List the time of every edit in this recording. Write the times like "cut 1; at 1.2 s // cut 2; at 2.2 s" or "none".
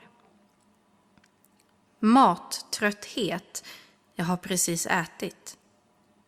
none